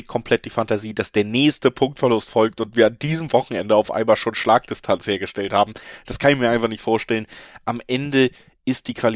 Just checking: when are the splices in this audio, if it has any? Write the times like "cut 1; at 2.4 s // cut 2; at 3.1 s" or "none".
none